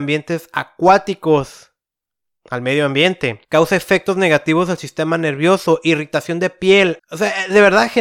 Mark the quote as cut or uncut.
cut